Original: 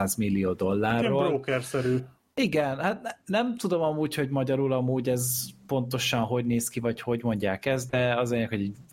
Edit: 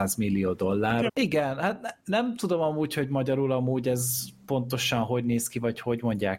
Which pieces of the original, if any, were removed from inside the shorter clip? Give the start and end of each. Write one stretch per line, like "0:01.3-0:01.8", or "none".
0:01.1-0:02.3